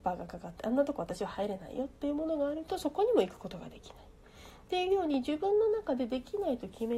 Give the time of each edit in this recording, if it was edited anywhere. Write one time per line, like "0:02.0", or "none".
none